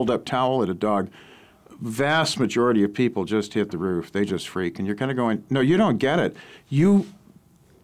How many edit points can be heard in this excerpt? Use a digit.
0